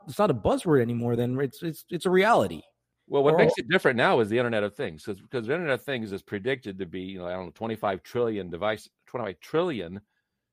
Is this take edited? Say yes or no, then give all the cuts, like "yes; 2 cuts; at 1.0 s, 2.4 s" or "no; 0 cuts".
no; 0 cuts